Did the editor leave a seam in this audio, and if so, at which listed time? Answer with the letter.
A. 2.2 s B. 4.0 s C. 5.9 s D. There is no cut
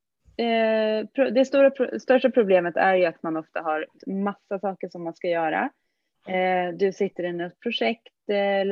B